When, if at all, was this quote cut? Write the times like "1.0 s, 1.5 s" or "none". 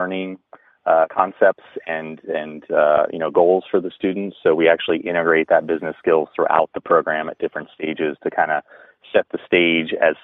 none